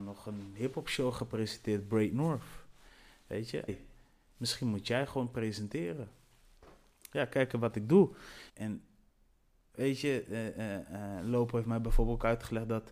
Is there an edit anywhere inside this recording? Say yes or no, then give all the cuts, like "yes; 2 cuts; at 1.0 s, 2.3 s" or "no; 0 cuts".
yes; 2 cuts; at 3.7 s, 8.5 s